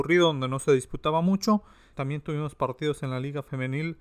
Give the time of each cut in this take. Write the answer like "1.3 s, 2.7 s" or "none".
1.9 s